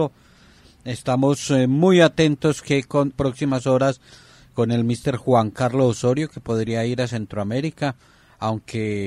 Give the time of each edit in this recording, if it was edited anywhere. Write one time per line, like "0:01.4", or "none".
0:03.1